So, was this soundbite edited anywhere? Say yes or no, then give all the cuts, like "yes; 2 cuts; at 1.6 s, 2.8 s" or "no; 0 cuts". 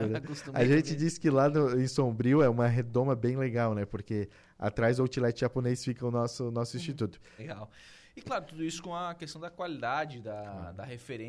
yes; 1 cut; at 7.4 s